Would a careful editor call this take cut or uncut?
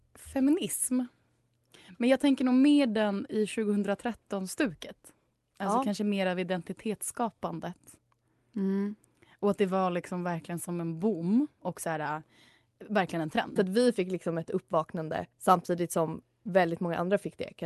cut